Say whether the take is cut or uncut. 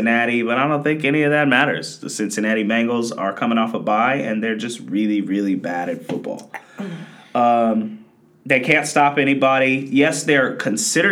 uncut